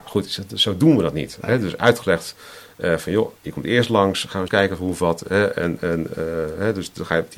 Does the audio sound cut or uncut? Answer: cut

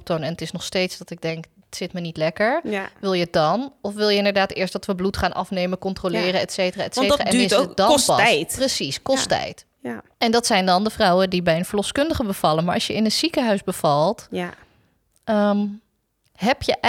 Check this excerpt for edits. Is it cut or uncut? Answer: uncut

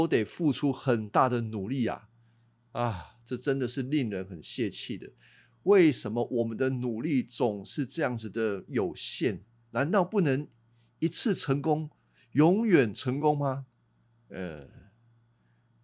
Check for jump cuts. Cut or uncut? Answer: uncut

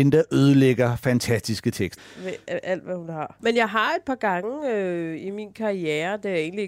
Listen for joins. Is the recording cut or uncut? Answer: cut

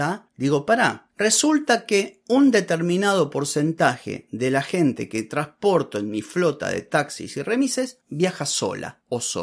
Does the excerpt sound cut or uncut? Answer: uncut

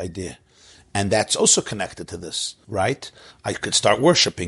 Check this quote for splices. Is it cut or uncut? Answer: cut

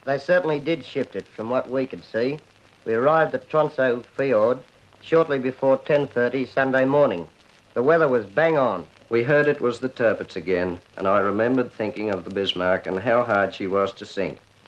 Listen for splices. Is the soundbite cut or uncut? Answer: cut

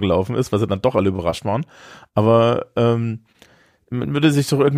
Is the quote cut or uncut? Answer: uncut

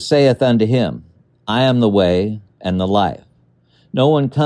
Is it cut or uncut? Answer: cut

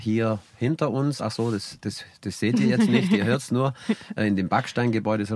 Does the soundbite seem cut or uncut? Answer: uncut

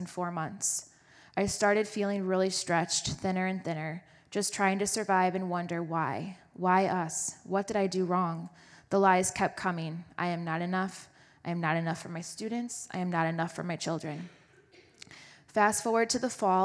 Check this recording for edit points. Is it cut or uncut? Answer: uncut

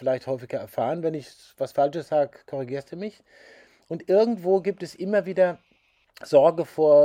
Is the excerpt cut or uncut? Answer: uncut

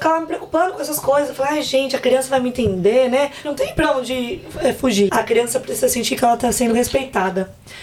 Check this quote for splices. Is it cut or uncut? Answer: cut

